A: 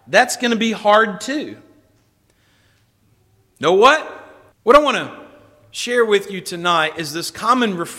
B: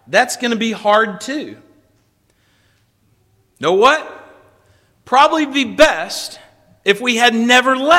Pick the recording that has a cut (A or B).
A